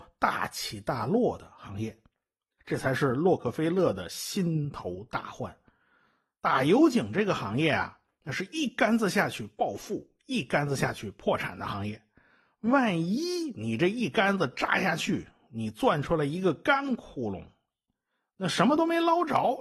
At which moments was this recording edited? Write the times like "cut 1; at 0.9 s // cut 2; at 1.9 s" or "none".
cut 1; at 2.6 s